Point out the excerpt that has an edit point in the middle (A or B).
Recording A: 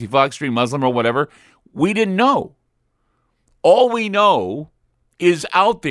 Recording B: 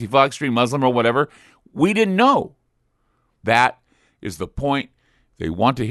B